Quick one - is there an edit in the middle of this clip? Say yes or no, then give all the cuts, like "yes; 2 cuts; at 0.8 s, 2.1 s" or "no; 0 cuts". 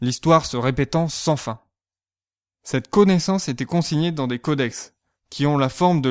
no; 0 cuts